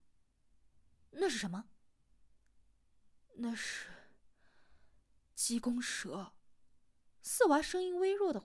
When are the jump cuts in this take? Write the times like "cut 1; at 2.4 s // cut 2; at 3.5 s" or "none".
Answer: none

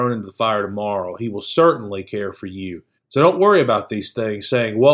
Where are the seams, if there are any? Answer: cut 1; at 3.0 s

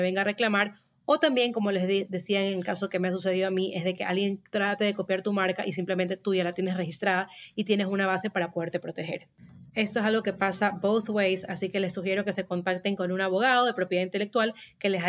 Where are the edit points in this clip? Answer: none

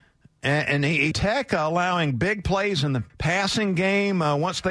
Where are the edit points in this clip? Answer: cut 1; at 1.1 s // cut 2; at 3.1 s

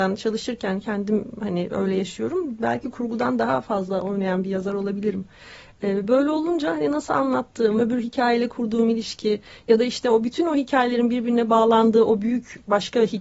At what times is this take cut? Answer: cut 1; at 7.8 s

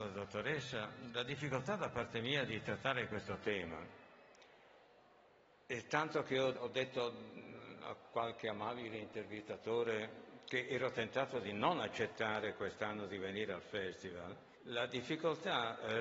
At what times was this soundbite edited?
cut 1; at 6.5 s // cut 2; at 14.5 s

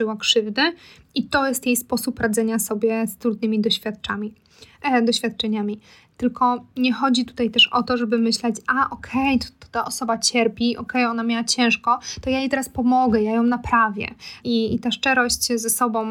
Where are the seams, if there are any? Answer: cut 1; at 14.4 s

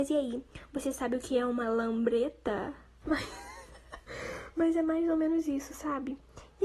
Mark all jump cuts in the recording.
cut 1; at 3.0 s

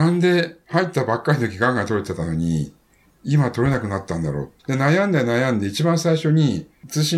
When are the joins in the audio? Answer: cut 1; at 4.6 s

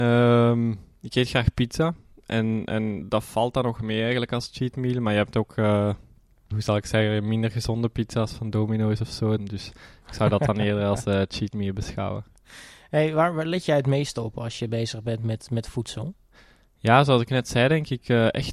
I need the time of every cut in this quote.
cut 1; at 6.5 s // cut 2; at 9.4 s

